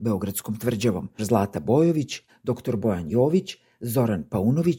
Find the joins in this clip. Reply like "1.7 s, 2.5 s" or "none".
1.2 s, 2.3 s